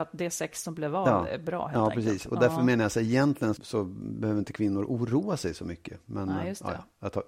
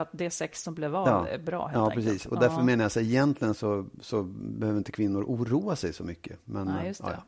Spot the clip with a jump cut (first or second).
first